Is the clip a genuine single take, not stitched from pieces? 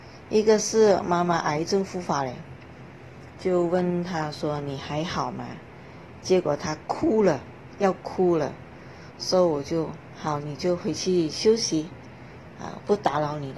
yes; 0 cuts

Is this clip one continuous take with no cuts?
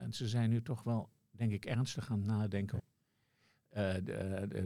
no; 1 cut; at 2.8 s

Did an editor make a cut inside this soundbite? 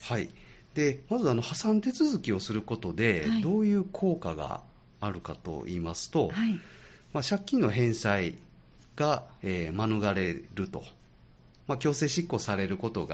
no; 0 cuts

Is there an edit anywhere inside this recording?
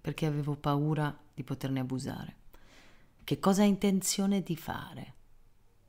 yes; 1 cut; at 3.2 s

